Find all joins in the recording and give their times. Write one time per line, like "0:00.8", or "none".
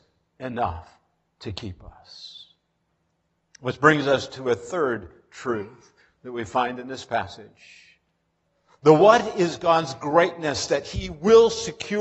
none